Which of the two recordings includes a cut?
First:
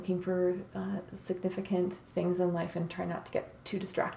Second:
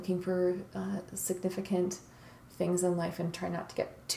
first; 1 cut; at 2.0 s

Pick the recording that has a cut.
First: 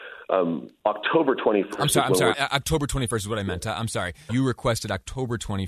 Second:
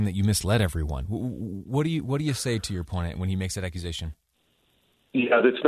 first; 2 cuts; at 2.3 s, 4.3 s

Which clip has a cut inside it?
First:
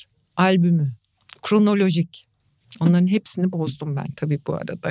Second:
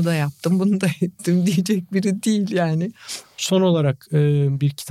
second; 1 cut; at 3.2 s

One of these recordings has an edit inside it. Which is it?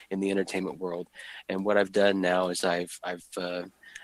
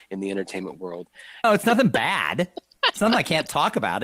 second; 1 cut; at 1.4 s

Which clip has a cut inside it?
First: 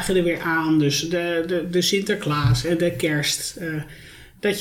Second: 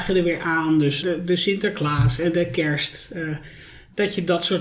second; 1 cut; at 1.0 s

